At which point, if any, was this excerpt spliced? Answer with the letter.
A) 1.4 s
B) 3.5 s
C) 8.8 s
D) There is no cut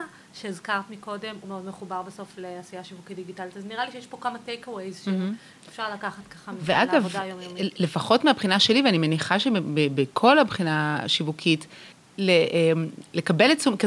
A